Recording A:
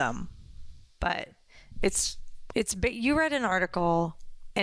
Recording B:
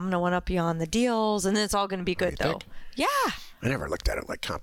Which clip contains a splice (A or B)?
A